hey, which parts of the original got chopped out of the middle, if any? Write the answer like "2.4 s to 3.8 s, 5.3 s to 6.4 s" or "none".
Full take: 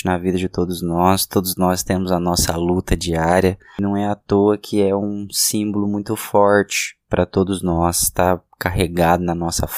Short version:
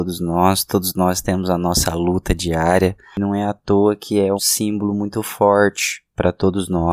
5.0 s to 5.3 s